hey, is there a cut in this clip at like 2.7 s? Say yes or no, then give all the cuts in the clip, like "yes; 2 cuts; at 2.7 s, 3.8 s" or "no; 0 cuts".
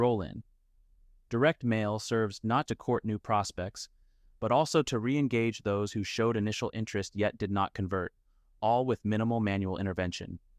yes; 1 cut; at 2.7 s